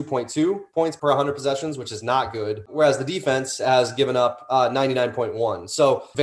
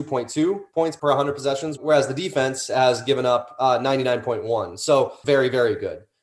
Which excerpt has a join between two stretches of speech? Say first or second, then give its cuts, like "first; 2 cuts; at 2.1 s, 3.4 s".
second; 1 cut; at 1.8 s